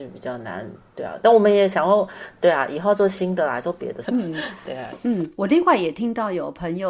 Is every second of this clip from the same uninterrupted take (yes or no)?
no